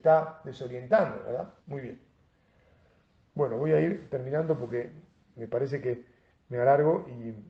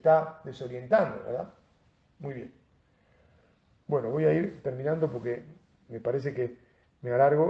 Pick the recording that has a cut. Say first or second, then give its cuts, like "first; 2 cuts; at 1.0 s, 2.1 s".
first; 1 cut; at 1.6 s